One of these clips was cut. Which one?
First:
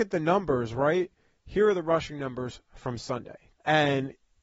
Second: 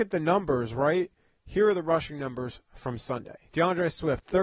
first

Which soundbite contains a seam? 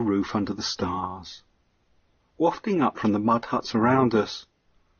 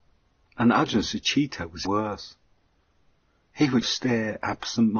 second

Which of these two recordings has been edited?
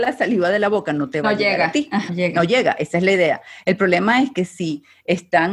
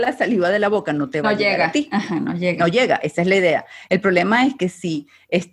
first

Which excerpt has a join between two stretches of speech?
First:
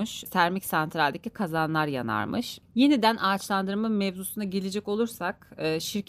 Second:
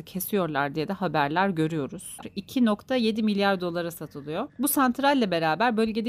second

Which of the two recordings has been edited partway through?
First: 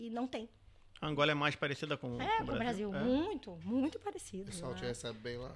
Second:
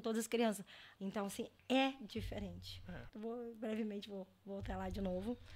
second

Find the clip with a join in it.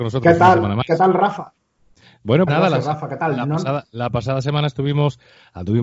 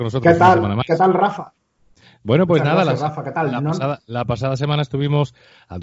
first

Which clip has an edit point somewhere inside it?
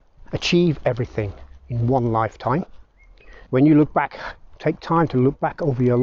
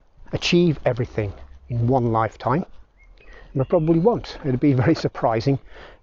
first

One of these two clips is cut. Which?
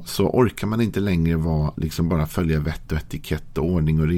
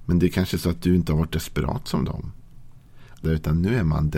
second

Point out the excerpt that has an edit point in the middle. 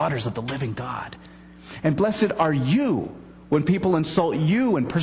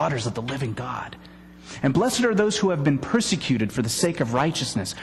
first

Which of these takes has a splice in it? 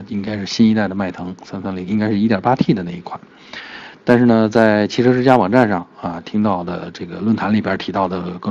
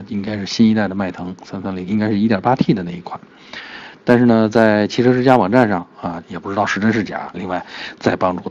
second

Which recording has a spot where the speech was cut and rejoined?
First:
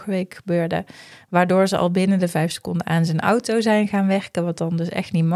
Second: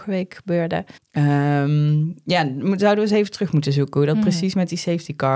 second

